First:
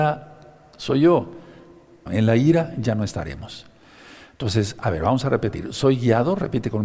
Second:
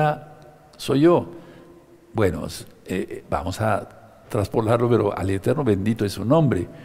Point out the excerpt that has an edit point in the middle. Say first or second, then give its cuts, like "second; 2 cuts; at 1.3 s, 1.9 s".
first; 1 cut; at 2.1 s